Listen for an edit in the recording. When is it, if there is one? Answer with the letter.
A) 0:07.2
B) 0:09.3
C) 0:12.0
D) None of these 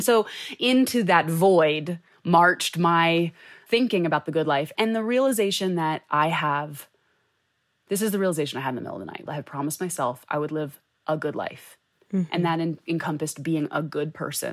B